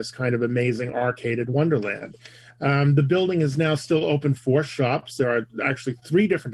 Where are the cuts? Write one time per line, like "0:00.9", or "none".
none